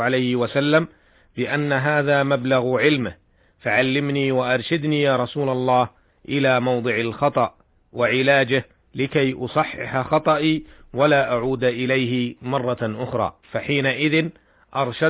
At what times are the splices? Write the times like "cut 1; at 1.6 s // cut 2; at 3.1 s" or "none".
cut 1; at 13.4 s